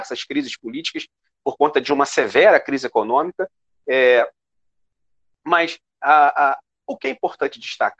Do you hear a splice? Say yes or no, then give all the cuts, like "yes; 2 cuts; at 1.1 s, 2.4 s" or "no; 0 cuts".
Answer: no; 0 cuts